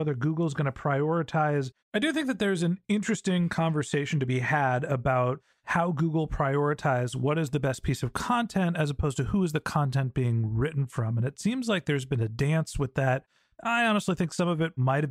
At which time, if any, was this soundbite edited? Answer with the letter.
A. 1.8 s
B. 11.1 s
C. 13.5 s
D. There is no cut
A